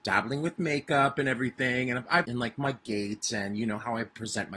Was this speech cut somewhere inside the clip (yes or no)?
yes